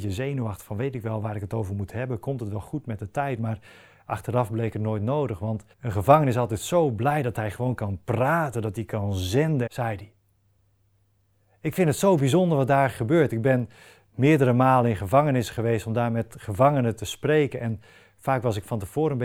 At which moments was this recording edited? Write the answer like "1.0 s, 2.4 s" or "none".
5.7 s, 9.7 s